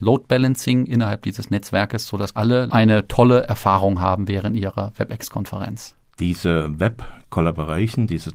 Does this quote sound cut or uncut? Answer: uncut